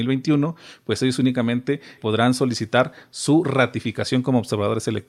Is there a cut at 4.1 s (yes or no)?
no